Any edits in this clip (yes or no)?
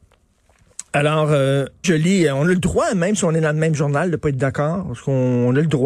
yes